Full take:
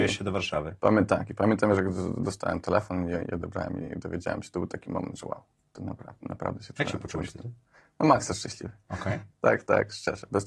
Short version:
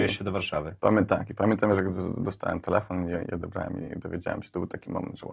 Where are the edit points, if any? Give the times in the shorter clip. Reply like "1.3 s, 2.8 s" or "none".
none